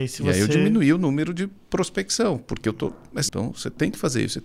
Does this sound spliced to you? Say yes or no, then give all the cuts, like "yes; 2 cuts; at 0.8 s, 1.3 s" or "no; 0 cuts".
yes; 1 cut; at 3.3 s